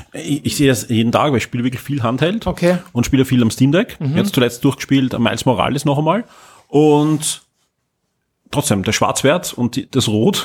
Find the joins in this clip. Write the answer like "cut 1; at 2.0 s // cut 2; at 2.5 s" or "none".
none